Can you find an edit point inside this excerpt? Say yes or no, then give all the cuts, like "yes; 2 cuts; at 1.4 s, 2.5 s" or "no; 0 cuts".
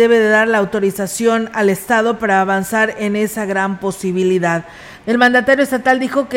yes; 1 cut; at 5.0 s